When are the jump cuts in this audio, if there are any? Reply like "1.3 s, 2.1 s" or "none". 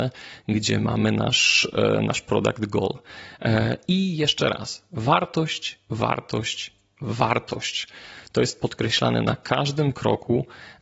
none